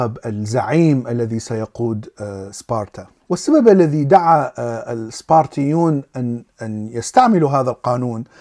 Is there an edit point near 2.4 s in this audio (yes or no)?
no